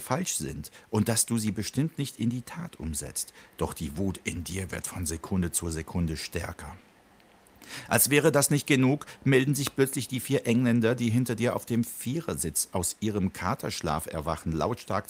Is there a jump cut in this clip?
no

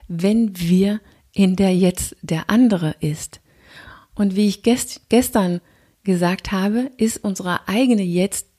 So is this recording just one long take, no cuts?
yes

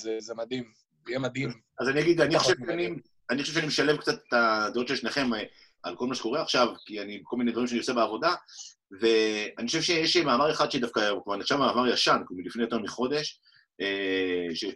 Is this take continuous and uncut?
no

